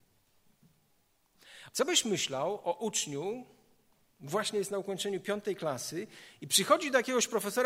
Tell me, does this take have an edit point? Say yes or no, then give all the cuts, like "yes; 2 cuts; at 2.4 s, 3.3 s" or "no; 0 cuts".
yes; 2 cuts; at 1.7 s, 4.1 s